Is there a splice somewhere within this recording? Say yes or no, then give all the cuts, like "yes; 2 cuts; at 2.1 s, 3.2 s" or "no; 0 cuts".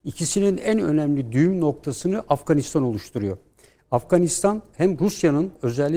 no; 0 cuts